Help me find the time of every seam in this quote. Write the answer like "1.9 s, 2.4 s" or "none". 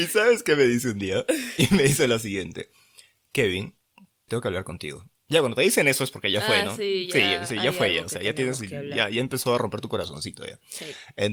4.3 s